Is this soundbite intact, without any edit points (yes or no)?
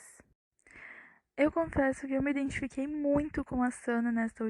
yes